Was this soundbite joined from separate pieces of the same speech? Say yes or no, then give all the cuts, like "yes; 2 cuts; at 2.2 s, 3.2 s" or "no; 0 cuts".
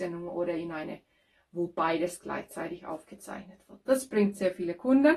no; 0 cuts